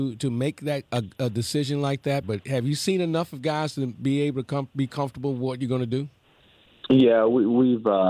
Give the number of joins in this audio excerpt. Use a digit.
1